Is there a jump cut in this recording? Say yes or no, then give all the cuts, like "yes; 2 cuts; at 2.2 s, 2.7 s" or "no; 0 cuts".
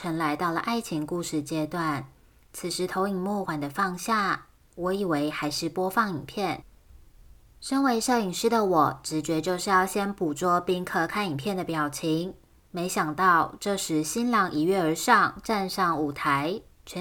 yes; 1 cut; at 3.5 s